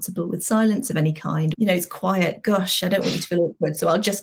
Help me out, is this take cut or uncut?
cut